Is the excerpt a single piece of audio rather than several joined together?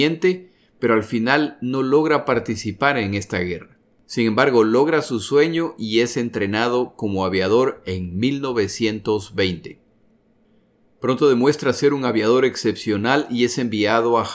yes; 0 cuts

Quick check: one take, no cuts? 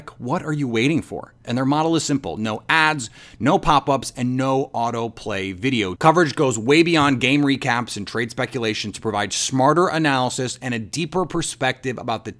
no; 2 cuts; at 1.4 s, 6.0 s

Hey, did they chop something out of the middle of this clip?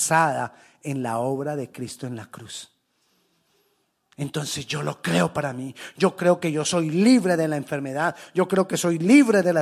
no; 0 cuts

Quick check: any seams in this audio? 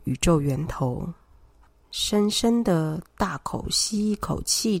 yes; 1 cut; at 1.8 s

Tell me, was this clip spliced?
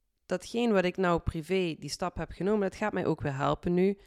no; 0 cuts

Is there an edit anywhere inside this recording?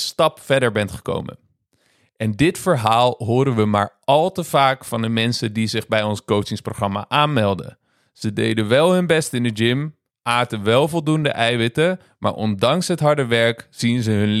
no; 0 cuts

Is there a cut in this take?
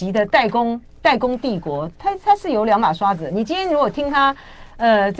no; 0 cuts

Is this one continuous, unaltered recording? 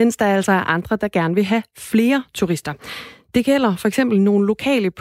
yes; 0 cuts

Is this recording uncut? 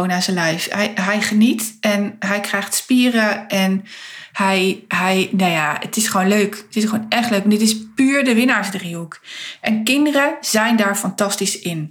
yes; 0 cuts

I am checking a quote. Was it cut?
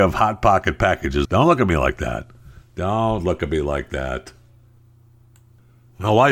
yes; 1 cut; at 1.2 s

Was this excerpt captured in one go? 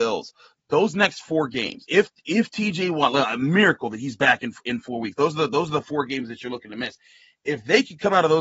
yes; 0 cuts

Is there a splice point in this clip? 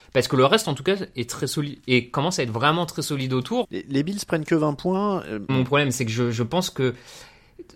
yes; 2 cuts; at 3.6 s, 5.5 s

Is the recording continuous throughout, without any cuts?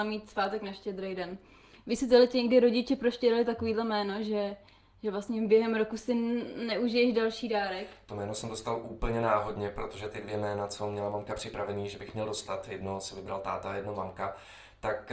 yes; 0 cuts

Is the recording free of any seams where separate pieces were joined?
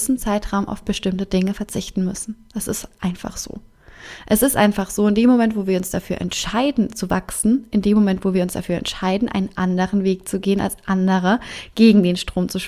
yes; 0 cuts

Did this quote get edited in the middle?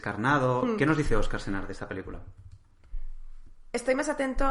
no; 0 cuts

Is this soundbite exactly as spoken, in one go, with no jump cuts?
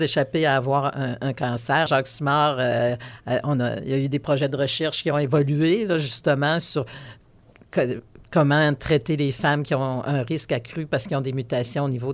no; 1 cut; at 1.9 s

